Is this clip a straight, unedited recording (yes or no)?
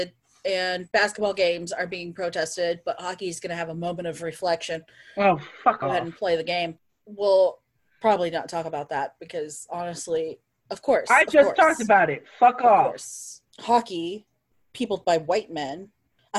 yes